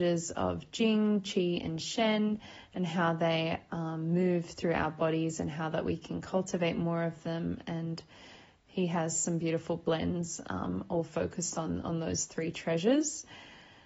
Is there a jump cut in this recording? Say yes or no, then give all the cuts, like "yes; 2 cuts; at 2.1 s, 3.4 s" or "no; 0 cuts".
no; 0 cuts